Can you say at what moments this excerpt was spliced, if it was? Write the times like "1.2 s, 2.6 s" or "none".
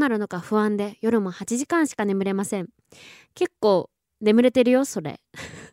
none